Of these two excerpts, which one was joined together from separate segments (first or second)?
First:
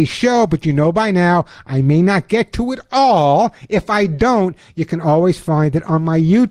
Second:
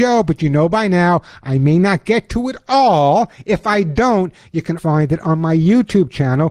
second